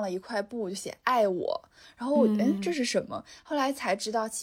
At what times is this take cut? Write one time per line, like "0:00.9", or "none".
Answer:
none